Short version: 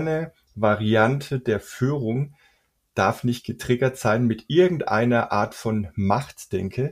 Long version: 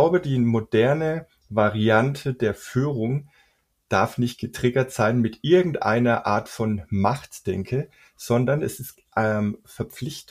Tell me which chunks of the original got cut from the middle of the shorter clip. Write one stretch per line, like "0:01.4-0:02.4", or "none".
none